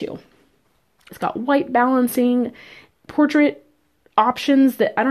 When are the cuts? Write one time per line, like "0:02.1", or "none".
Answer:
0:01.1
0:03.1